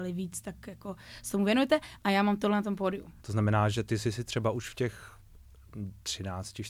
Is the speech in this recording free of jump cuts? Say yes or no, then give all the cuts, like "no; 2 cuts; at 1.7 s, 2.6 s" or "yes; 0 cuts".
no; 2 cuts; at 2.0 s, 3.2 s